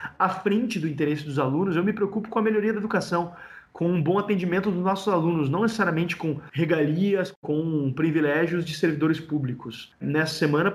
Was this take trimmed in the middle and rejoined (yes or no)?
no